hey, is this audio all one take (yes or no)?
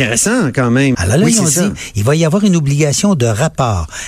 no